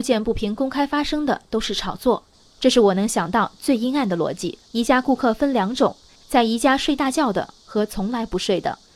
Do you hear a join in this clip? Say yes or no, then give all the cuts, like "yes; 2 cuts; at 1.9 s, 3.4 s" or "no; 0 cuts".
yes; 1 cut; at 4.6 s